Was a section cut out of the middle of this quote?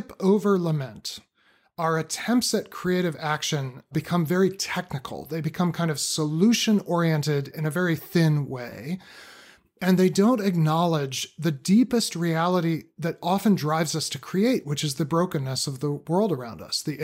no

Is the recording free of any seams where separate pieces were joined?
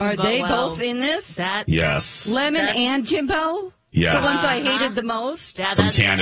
yes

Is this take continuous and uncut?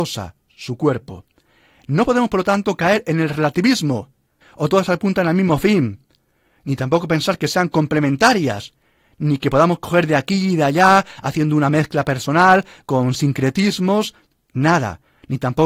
no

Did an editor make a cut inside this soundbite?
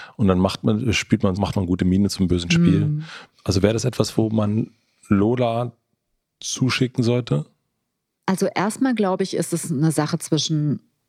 yes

